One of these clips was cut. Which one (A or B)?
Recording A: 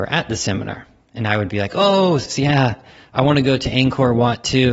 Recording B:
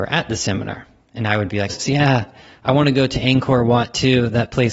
B